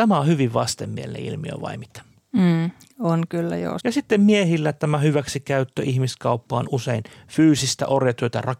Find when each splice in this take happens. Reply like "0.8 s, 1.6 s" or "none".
3.8 s, 6.7 s